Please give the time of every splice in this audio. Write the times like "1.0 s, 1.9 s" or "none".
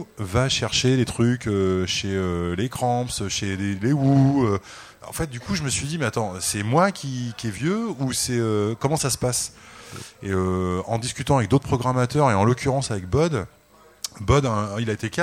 none